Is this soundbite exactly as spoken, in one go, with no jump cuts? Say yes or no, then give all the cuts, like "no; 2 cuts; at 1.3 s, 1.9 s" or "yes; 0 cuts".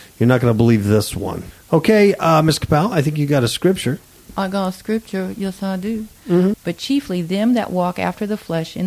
no; 2 cuts; at 1.5 s, 6.5 s